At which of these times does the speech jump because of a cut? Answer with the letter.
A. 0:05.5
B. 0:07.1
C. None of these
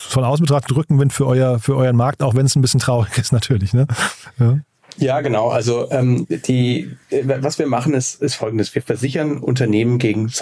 C